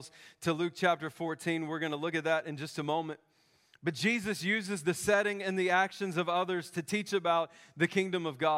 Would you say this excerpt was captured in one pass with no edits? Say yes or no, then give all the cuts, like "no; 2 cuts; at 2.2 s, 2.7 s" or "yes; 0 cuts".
yes; 0 cuts